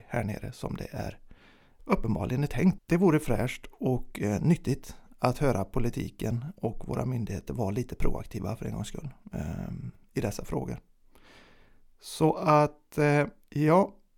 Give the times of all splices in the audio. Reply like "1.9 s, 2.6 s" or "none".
2.8 s